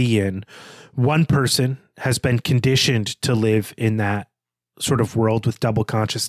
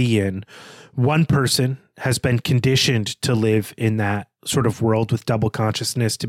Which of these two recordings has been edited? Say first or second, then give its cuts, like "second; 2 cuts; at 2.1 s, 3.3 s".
second; 1 cut; at 4.4 s